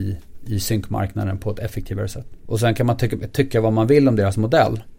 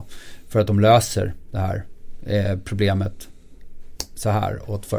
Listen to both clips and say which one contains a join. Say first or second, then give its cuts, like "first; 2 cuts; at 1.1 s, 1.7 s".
first; 1 cut; at 2.5 s